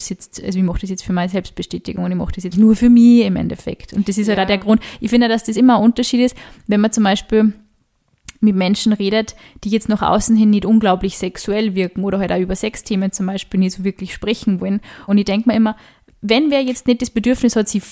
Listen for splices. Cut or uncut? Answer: cut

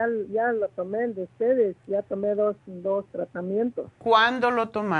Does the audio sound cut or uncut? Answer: uncut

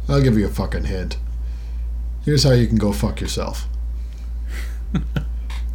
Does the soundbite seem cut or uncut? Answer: uncut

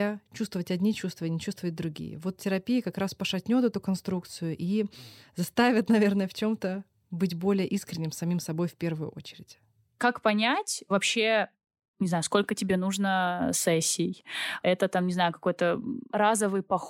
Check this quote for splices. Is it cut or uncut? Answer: uncut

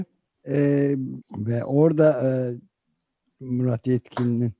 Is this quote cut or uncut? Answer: cut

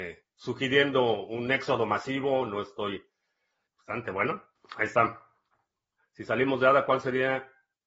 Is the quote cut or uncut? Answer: cut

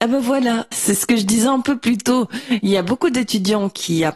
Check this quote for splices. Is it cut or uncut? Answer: uncut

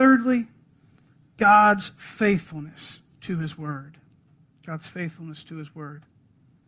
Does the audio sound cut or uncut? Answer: uncut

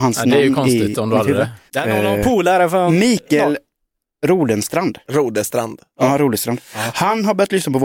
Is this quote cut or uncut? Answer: cut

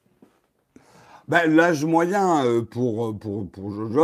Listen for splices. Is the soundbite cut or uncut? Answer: uncut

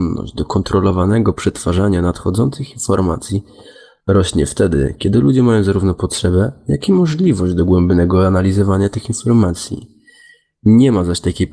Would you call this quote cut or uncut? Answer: uncut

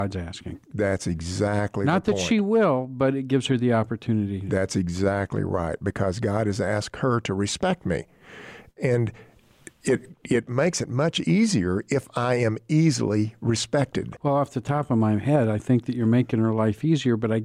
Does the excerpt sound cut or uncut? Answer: cut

